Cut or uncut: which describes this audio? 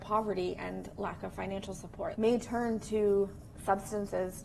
cut